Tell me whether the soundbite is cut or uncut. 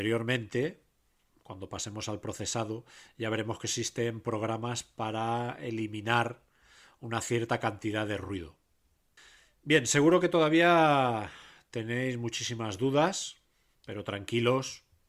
uncut